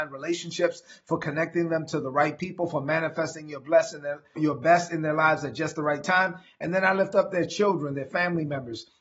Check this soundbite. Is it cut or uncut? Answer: cut